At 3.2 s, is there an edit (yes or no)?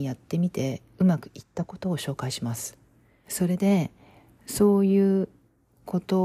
yes